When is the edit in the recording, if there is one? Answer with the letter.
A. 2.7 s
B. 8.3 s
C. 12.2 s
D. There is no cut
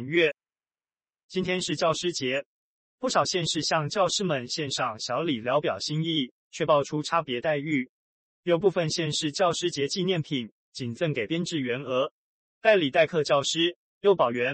D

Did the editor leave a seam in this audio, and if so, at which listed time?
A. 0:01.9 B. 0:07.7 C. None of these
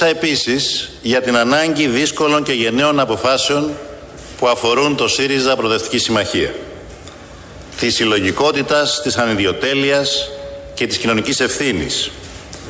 B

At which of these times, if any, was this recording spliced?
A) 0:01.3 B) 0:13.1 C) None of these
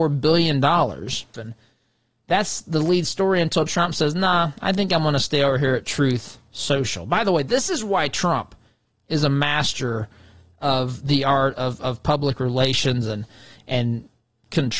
A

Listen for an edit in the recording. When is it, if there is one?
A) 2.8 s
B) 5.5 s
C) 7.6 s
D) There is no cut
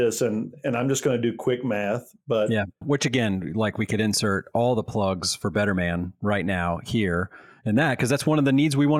A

